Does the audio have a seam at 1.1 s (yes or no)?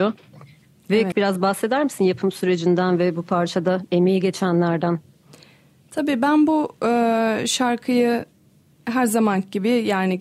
yes